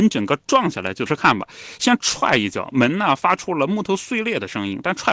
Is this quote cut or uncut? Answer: cut